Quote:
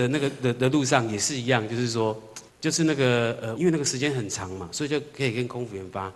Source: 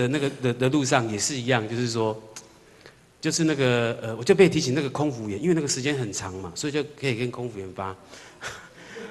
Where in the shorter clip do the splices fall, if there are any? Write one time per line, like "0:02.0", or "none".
0:02.5
0:03.6